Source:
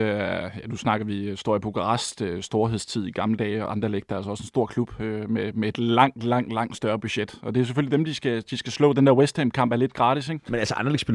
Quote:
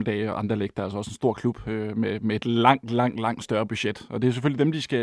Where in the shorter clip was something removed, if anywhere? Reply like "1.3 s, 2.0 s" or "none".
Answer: none